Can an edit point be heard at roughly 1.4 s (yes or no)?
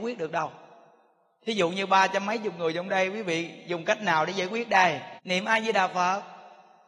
no